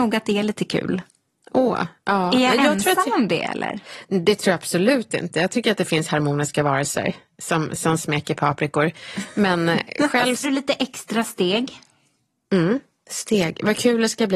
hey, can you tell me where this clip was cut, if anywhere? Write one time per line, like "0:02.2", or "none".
0:10.4